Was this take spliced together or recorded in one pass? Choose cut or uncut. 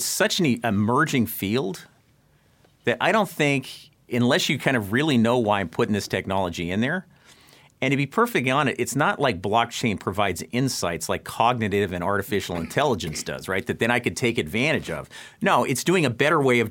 uncut